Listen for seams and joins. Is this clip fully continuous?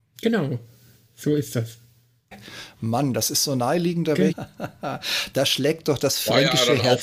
no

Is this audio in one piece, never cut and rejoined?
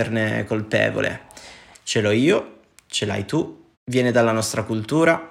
no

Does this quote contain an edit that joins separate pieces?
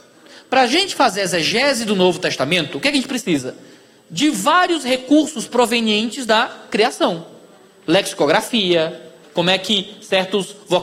yes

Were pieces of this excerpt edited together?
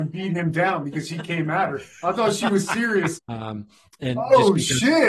yes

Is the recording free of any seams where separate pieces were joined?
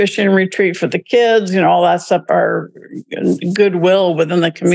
no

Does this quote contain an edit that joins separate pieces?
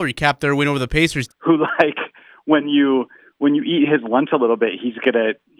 yes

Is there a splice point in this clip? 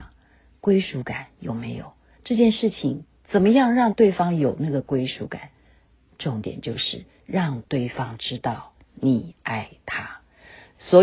yes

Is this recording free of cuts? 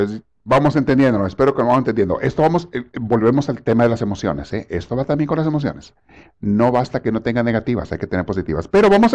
yes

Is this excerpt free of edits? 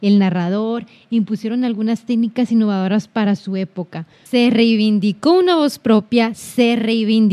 no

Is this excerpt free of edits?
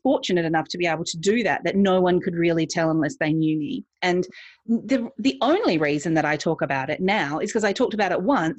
yes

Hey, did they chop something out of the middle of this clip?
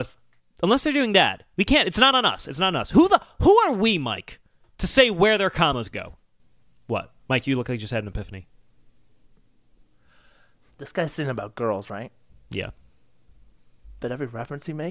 yes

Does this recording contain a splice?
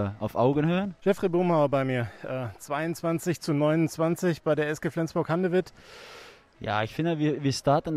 yes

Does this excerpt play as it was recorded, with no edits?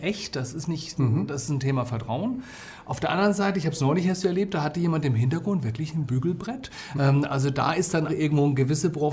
no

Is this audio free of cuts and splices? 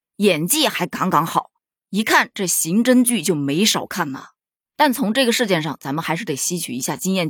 yes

